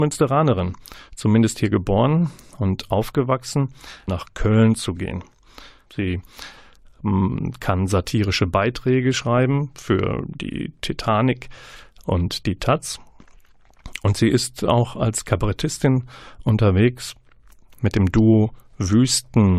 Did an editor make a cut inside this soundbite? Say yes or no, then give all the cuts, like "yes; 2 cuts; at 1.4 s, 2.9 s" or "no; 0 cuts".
yes; 2 cuts; at 4.1 s, 5.9 s